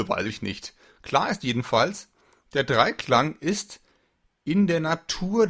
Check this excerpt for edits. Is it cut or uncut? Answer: uncut